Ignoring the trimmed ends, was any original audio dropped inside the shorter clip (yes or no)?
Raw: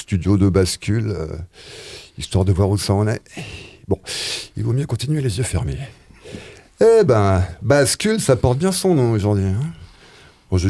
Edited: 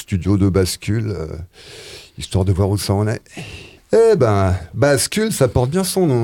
yes